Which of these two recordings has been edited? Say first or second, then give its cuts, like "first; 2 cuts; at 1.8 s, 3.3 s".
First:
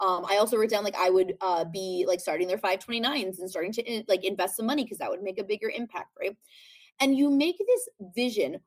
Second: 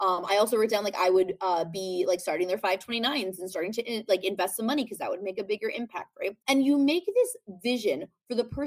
second; 1 cut; at 6.4 s